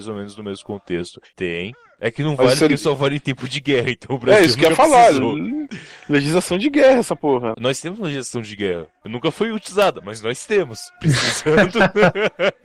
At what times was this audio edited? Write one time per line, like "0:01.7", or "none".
0:01.3
0:07.5